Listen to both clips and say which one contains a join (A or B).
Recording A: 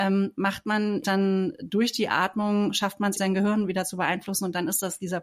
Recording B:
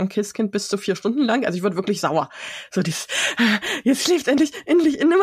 A